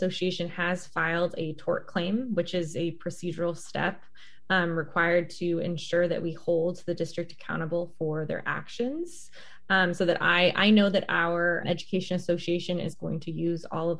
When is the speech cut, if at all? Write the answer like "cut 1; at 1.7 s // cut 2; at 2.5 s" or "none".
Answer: cut 1; at 11.6 s